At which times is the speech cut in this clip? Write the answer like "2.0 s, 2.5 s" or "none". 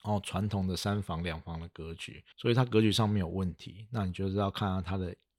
2.3 s